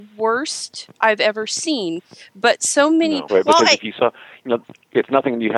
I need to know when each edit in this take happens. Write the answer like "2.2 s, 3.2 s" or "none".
3.3 s